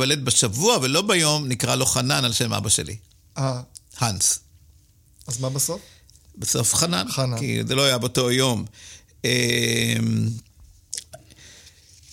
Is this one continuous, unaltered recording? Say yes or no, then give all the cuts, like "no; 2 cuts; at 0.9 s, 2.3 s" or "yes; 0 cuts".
yes; 0 cuts